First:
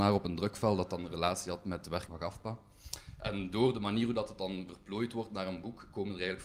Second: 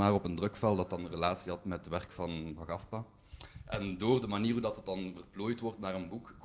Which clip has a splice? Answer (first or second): first